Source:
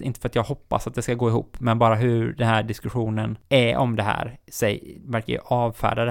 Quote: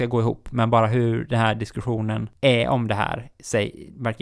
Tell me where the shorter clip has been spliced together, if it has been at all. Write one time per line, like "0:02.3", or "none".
none

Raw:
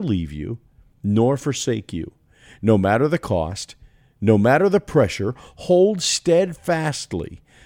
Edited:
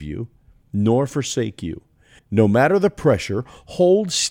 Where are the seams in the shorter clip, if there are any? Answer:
0:02.2

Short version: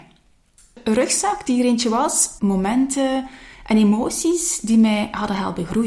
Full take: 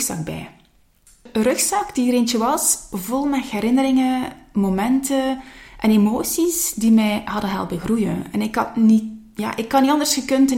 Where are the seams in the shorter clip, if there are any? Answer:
0:02.4

